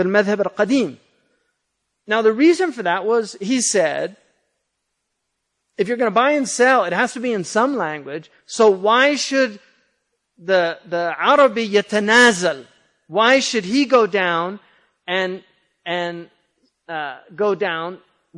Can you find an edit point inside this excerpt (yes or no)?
no